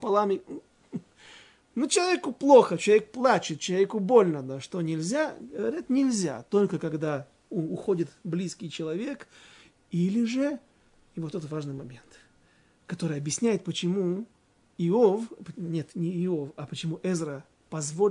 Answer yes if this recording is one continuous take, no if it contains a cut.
yes